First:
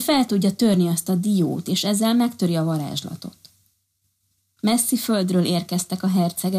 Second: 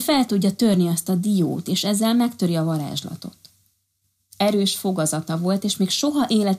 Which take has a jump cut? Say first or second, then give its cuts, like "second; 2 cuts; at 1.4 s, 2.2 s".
second; 1 cut; at 4.2 s